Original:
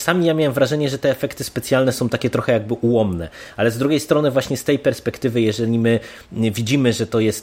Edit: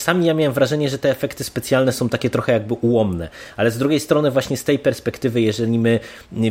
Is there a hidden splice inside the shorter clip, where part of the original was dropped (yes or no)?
no